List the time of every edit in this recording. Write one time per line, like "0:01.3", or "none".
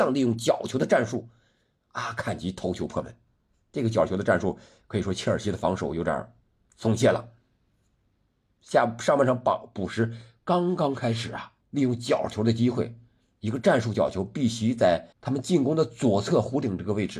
0:11.6
0:15.1